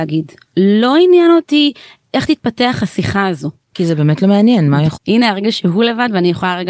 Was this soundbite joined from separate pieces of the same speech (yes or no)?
yes